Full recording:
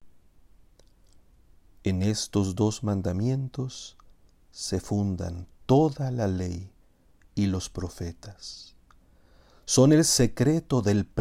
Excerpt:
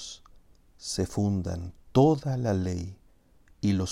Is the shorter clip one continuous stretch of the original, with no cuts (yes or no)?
yes